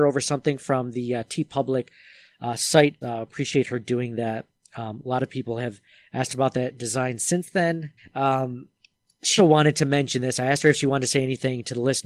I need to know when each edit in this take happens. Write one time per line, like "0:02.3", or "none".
0:03.0
0:08.0
0:09.4